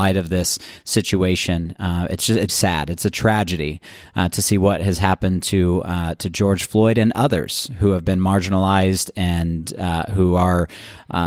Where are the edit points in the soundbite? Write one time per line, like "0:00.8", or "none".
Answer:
0:02.5